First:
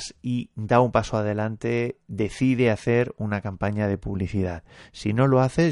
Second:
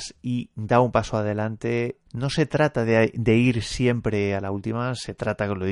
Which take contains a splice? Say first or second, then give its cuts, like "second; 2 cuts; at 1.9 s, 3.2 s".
second; 1 cut; at 2.1 s